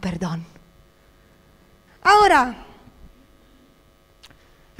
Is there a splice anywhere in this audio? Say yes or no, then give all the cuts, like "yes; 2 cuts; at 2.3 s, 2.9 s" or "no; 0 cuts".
yes; 1 cut; at 1.9 s